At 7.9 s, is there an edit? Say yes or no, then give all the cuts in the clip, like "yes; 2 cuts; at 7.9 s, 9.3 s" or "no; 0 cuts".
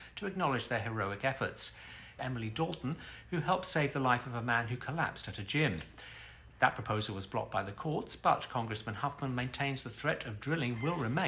no; 2 cuts; at 2.2 s, 6.5 s